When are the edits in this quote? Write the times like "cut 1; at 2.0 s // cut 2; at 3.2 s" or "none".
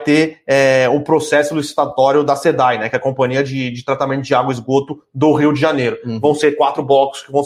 none